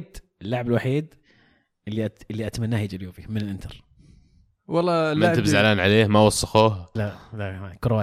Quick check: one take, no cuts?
no; 1 cut; at 7.0 s

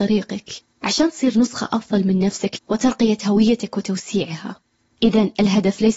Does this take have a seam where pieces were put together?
yes; 2 cuts; at 2.6 s, 4.8 s

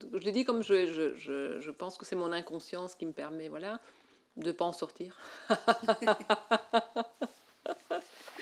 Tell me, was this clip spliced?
no; 0 cuts

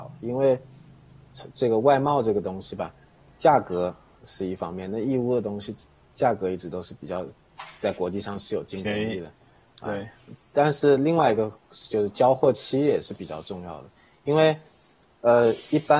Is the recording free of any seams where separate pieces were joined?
yes; 0 cuts

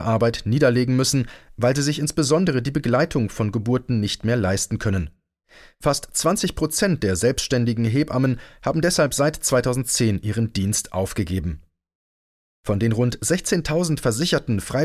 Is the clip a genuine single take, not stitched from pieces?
yes; 0 cuts

